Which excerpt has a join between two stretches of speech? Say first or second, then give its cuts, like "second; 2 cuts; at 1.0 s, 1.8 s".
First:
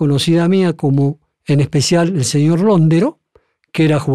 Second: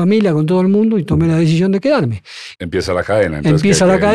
second; 1 cut; at 2.6 s